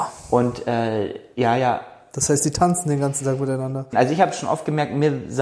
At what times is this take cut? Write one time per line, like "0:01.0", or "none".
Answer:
0:03.9